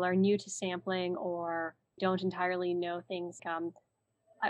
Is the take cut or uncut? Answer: cut